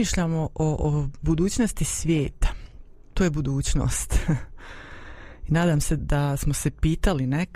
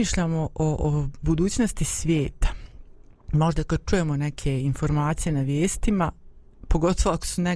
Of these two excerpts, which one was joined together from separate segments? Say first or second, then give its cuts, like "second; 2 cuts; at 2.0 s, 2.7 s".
first; 2 cuts; at 3.1 s, 6.0 s